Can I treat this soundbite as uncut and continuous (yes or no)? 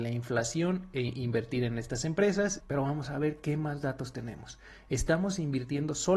no